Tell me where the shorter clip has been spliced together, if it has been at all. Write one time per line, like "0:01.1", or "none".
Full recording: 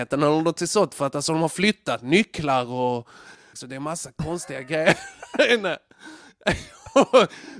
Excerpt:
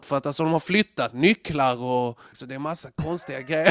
0:02.3